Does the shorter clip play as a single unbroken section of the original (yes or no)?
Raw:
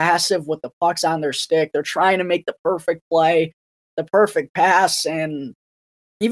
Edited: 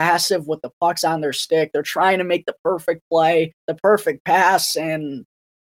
no